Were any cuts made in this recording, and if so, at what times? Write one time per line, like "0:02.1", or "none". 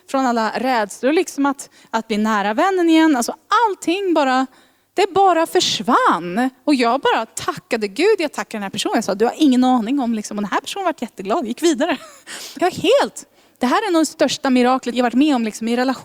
0:12.6
0:14.9